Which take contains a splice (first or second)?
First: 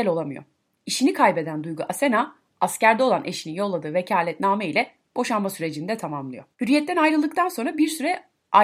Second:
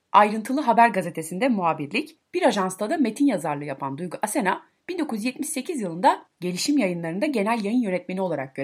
first